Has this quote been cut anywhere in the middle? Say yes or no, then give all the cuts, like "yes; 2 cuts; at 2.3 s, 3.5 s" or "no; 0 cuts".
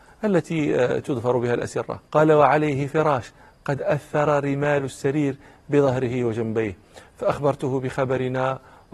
yes; 1 cut; at 2.0 s